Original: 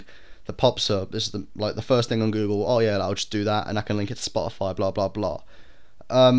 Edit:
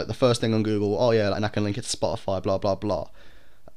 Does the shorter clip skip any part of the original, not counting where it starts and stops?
yes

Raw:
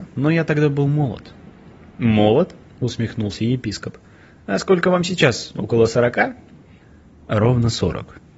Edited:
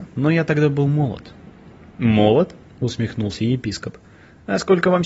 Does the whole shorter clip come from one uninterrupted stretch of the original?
yes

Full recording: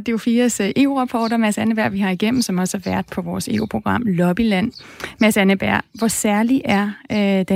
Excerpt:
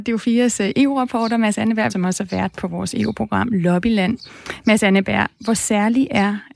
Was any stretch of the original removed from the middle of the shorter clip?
yes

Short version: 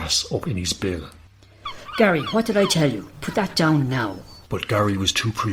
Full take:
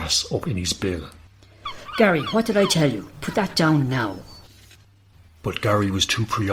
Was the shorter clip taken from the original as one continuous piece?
no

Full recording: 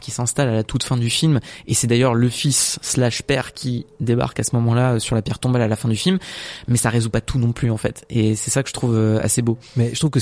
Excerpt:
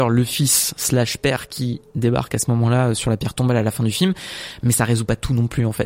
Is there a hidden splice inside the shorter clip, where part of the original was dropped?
no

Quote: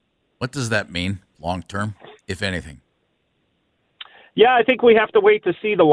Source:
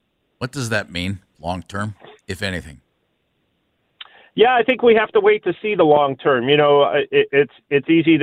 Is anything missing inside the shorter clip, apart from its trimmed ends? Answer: no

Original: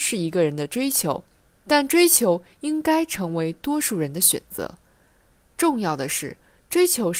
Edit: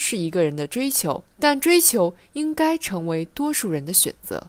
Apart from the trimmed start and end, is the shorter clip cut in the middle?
yes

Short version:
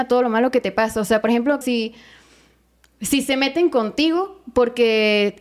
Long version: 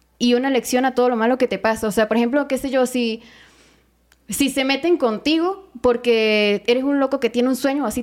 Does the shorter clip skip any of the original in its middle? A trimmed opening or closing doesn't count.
yes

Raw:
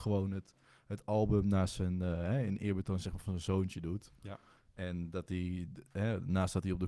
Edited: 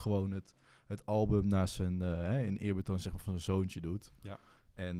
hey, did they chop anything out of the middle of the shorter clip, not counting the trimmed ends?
no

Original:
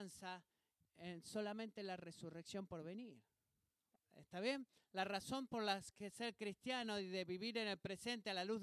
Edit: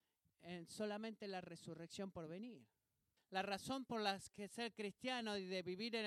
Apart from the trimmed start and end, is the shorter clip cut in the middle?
yes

